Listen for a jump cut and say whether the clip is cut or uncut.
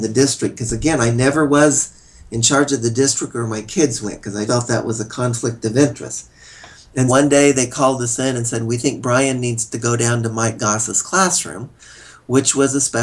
cut